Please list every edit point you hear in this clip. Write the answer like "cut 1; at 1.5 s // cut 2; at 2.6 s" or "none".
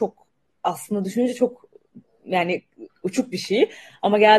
cut 1; at 2.9 s